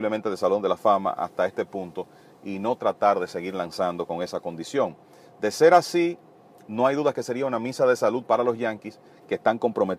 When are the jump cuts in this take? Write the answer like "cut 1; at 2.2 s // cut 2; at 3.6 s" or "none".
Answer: none